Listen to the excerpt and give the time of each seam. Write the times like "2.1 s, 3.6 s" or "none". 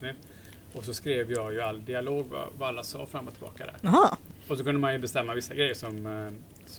none